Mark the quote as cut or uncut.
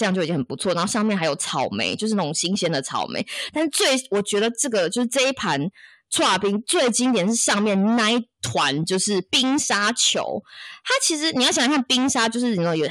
uncut